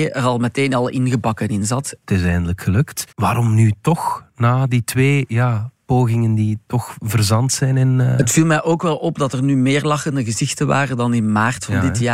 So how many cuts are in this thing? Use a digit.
2